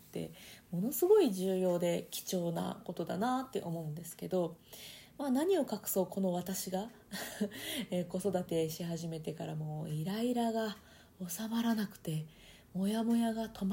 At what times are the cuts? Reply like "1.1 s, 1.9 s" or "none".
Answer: none